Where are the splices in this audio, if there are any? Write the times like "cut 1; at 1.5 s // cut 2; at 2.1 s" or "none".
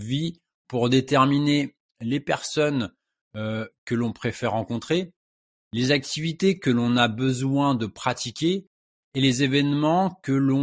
none